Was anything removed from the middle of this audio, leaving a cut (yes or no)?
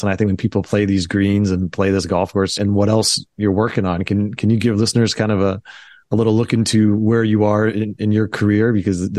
yes